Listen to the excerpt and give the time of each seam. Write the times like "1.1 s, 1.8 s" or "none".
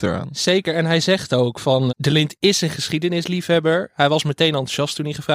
1.9 s